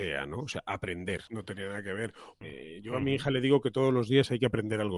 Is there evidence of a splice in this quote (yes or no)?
yes